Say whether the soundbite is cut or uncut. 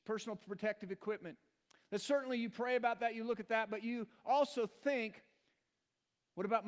uncut